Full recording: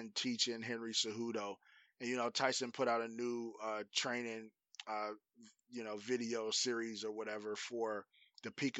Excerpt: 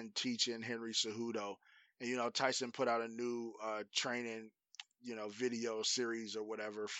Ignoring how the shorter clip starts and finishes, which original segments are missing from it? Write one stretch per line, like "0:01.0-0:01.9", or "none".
0:04.8-0:05.5

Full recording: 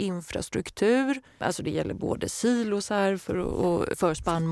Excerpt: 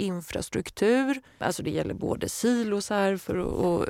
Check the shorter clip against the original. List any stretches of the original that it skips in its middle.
none

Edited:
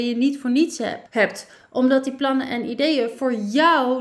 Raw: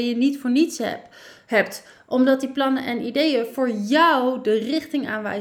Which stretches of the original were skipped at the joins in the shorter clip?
0:01.1-0:01.4

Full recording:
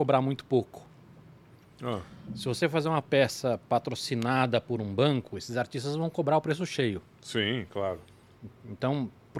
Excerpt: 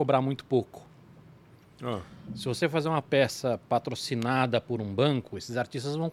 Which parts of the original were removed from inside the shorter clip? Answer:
none

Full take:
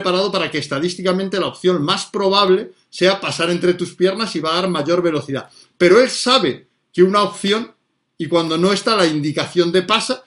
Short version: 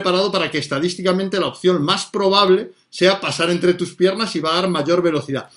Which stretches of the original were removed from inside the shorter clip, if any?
none

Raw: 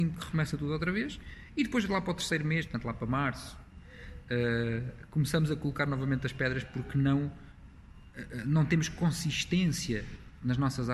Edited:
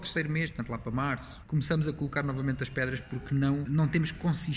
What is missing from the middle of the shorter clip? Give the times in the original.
0:03.6-0:05.1
0:07.3-0:08.4

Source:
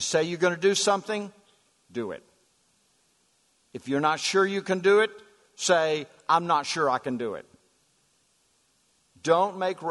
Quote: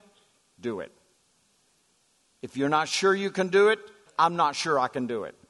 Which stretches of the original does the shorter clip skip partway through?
0:05.4-0:06.2

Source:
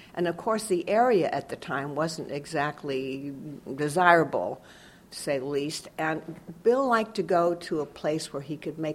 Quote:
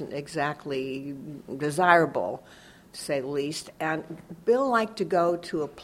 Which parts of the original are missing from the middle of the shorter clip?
none

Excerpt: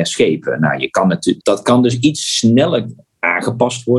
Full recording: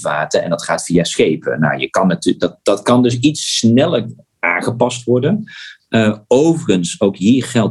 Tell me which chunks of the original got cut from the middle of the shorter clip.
0:02.4-0:02.6

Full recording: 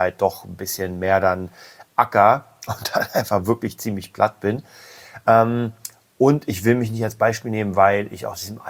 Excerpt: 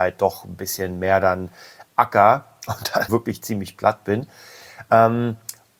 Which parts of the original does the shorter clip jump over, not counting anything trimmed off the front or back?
0:03.1-0:03.4

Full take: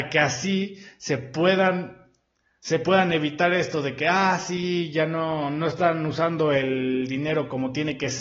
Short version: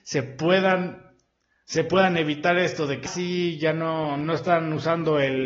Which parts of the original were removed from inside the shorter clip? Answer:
0:04.0-0:04.4

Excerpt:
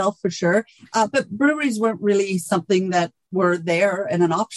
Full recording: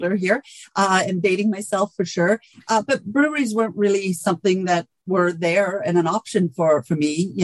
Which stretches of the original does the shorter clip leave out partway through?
none

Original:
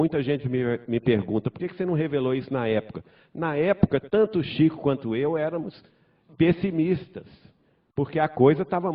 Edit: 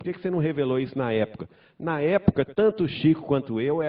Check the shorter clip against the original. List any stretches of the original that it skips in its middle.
none

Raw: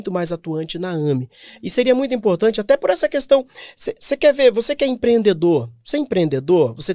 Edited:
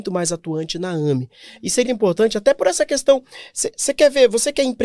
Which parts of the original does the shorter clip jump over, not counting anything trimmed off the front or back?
0:01.8-0:02.1

